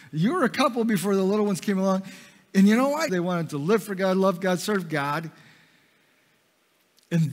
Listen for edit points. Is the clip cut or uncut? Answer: cut